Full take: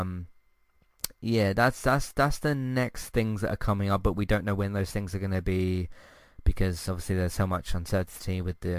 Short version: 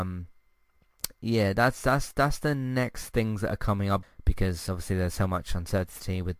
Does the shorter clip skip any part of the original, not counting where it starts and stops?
yes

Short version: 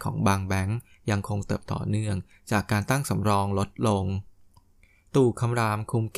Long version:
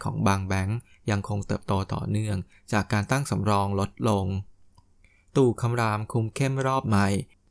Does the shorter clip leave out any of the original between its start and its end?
yes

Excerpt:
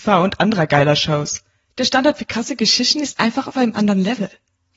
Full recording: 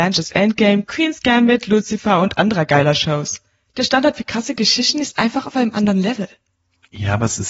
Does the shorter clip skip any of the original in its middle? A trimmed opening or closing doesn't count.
no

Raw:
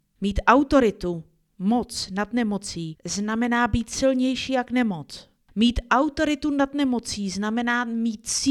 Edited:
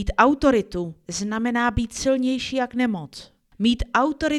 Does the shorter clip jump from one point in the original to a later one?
yes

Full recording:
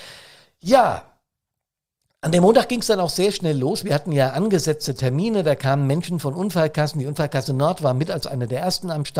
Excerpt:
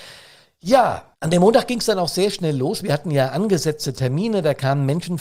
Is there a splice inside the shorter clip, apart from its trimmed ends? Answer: yes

